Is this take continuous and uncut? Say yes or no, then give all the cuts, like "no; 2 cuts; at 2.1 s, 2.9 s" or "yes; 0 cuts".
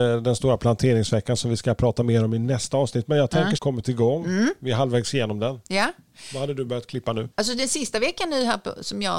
no; 2 cuts; at 3.6 s, 7.3 s